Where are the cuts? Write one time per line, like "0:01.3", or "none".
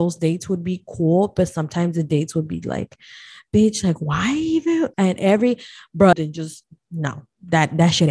0:04.9
0:06.1